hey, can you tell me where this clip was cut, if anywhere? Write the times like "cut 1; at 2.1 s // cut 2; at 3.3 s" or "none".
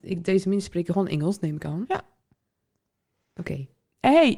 none